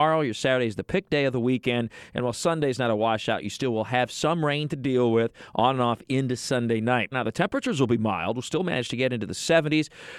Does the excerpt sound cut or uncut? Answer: cut